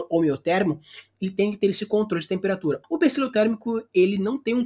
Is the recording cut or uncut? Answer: cut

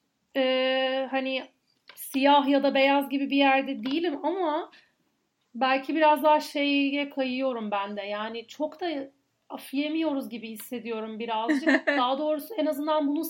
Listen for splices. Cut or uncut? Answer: uncut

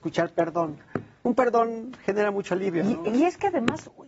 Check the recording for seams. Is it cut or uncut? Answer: uncut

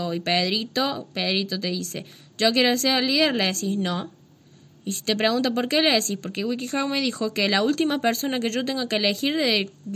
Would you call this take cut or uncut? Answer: uncut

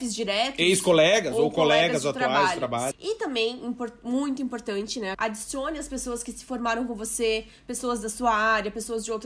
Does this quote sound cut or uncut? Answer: cut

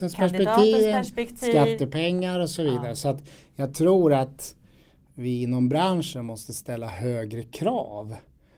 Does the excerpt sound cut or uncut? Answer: uncut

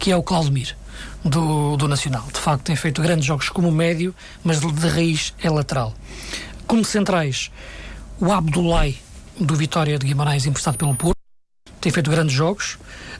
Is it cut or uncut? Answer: uncut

